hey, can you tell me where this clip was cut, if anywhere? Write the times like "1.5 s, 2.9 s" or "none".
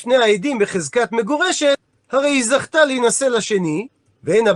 none